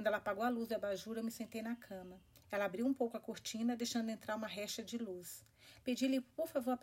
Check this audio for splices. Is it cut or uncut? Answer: cut